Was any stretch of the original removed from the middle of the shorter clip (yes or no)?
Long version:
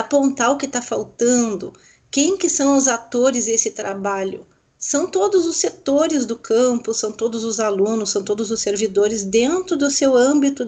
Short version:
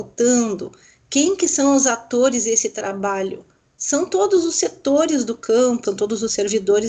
yes